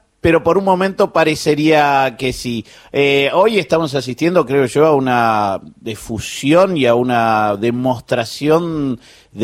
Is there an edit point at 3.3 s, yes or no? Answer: no